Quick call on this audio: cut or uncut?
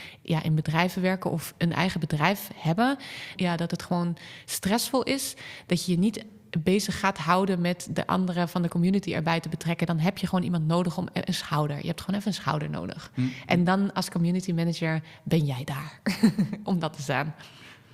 cut